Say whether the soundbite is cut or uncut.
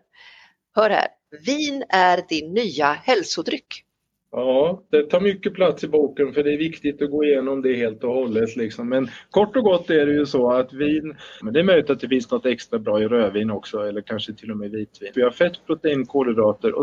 cut